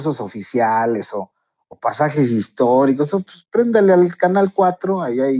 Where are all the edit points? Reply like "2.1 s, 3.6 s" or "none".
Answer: 1.7 s